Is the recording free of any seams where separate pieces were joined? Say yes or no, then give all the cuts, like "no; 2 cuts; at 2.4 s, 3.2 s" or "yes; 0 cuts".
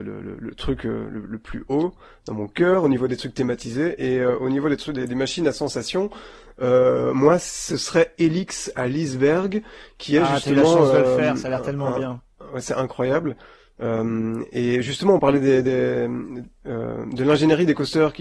yes; 0 cuts